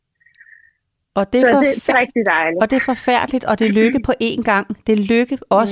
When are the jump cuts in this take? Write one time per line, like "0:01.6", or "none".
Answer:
0:01.9